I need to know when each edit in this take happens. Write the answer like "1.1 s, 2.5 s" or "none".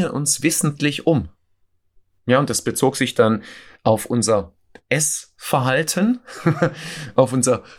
none